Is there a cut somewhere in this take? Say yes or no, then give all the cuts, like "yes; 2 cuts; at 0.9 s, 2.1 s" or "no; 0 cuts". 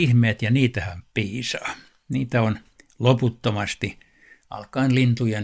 no; 0 cuts